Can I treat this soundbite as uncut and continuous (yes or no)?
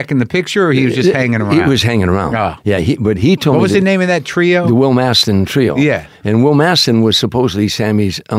yes